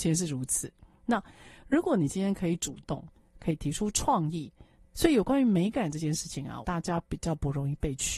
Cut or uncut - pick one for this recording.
cut